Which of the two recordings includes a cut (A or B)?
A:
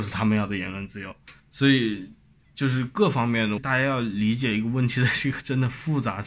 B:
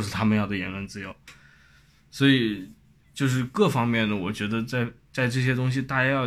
A